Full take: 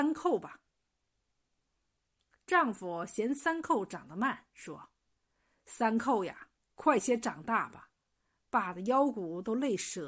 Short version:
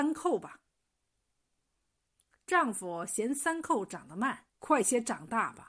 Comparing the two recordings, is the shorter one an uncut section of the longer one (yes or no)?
no